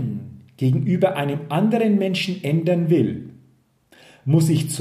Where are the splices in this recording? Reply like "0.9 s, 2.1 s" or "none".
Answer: none